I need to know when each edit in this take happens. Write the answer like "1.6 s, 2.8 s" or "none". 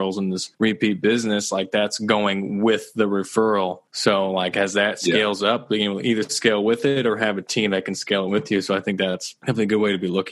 none